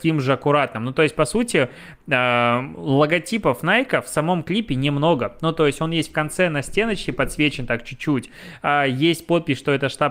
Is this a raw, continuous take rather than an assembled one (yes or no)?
yes